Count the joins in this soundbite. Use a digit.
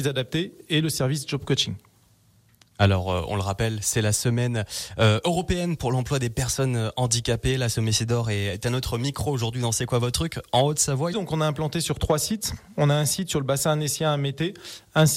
1